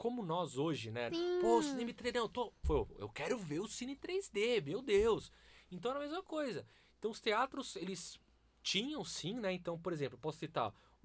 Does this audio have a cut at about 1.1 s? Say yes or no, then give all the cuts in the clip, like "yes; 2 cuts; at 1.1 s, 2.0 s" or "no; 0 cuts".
yes; 1 cut; at 1.1 s